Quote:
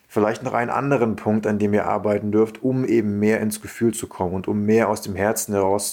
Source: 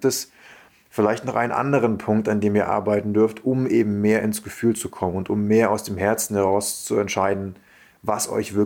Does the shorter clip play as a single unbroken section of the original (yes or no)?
yes